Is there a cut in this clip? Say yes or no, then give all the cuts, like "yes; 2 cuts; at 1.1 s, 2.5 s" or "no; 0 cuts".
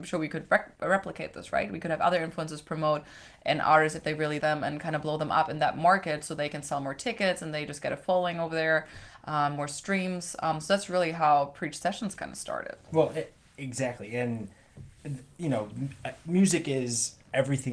yes; 1 cut; at 4.4 s